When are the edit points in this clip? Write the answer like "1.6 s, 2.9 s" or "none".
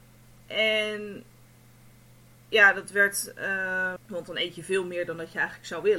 4.0 s

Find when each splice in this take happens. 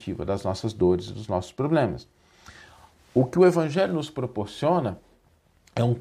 none

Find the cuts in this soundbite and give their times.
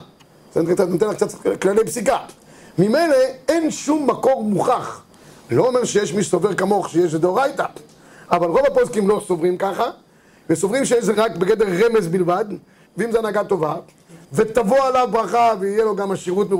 11.1 s, 12.9 s, 14.2 s

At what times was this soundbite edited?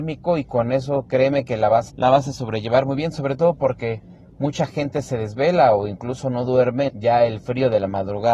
1.9 s, 6.9 s

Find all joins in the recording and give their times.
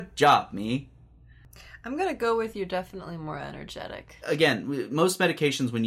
4.2 s

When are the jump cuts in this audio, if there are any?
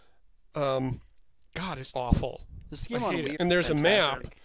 1.9 s, 3.4 s

